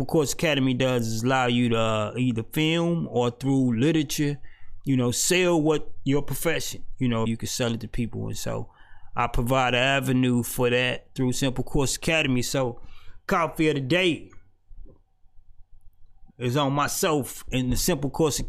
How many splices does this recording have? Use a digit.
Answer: 2